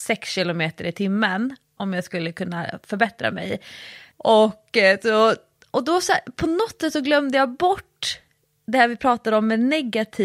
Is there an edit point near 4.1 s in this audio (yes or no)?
yes